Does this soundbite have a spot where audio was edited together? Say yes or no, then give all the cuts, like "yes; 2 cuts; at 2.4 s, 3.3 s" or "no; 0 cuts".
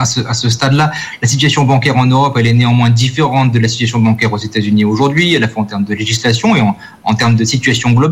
no; 0 cuts